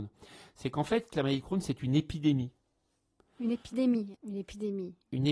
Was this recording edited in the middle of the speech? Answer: yes; 1 cut; at 4.1 s

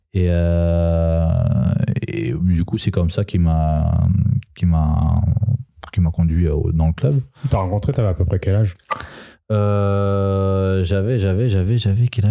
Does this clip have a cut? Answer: no; 0 cuts

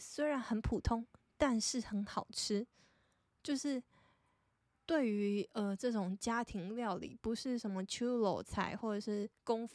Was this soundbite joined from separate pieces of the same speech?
no; 0 cuts

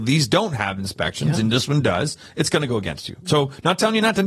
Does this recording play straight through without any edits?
yes; 0 cuts

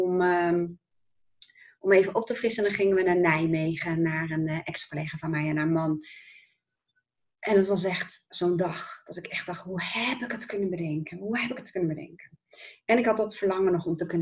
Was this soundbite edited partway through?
no; 0 cuts

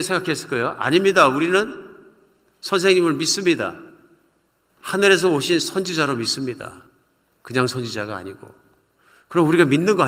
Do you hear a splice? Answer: no; 0 cuts

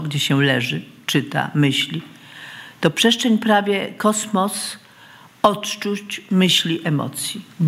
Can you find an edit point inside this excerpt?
no; 0 cuts

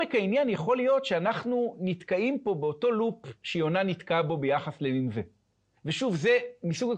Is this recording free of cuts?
no; 1 cut; at 5.8 s

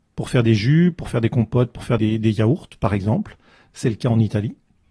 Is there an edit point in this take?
yes; 1 cut; at 2.0 s

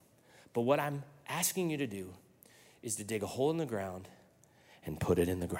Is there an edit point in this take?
no; 0 cuts

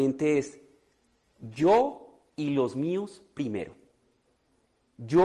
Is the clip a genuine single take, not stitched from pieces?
yes; 0 cuts

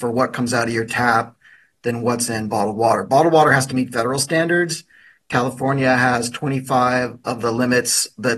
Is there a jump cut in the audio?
no; 0 cuts

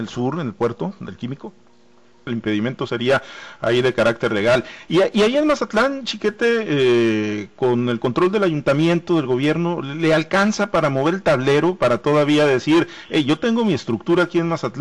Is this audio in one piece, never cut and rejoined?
no; 1 cut; at 2.3 s

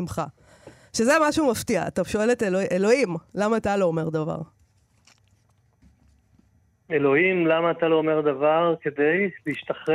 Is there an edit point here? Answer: no; 0 cuts

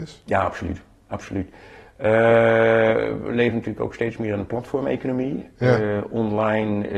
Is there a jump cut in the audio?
no; 0 cuts

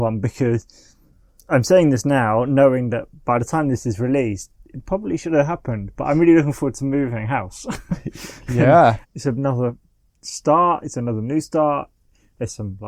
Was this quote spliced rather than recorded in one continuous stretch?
yes; 1 cut; at 9.0 s

